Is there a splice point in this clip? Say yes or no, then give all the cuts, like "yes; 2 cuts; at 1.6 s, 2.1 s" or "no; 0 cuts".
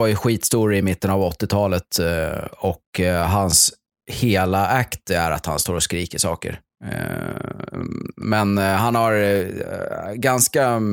no; 0 cuts